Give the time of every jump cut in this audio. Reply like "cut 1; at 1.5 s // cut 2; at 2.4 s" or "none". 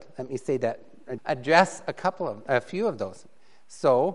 cut 1; at 1.2 s